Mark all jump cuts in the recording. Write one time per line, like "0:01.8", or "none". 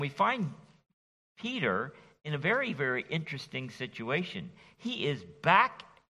none